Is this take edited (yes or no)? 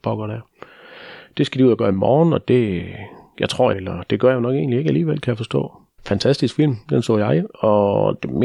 yes